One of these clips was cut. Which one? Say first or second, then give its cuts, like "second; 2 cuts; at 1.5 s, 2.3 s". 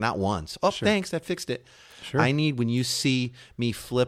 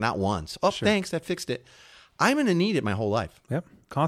first; 1 cut; at 1.9 s